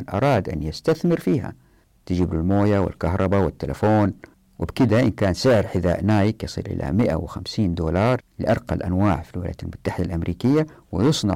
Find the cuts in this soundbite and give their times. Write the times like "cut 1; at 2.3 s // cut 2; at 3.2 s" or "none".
none

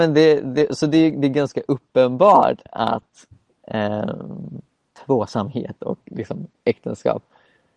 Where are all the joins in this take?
none

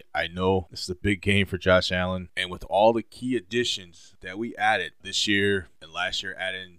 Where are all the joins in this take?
cut 1; at 2.3 s // cut 2; at 5.0 s

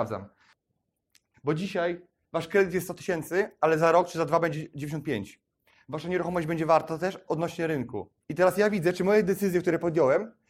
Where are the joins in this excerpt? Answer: cut 1; at 1.3 s // cut 2; at 8.2 s

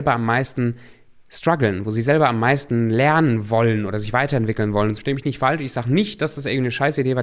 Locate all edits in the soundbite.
cut 1; at 5.0 s

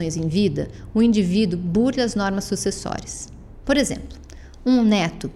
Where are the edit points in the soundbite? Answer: cut 1; at 3.6 s

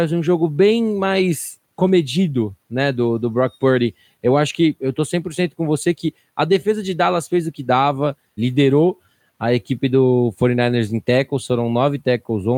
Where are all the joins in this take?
cut 1; at 8.4 s

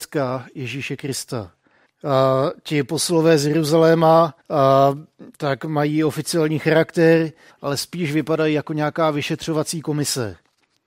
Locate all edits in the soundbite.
cut 1; at 1.9 s // cut 2; at 4.4 s // cut 3; at 7.5 s

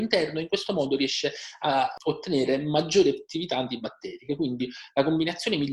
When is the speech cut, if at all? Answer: none

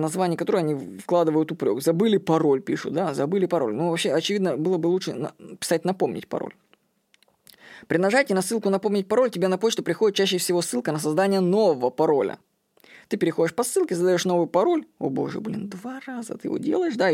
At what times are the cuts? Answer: none

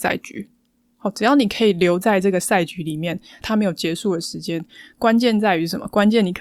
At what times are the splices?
cut 1; at 3.4 s

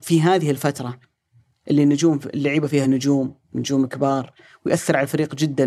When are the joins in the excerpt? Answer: none

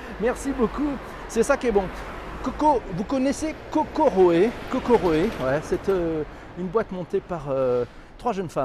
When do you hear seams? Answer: none

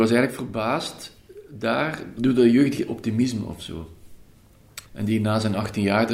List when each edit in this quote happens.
cut 1; at 4.9 s

